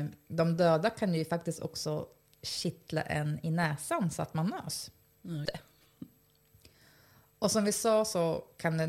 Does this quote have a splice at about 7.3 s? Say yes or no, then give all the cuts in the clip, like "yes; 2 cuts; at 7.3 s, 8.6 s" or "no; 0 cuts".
no; 1 cut; at 5.5 s